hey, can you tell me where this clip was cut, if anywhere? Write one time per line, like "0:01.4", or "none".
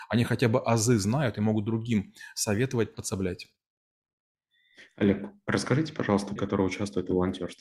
0:02.9
0:06.4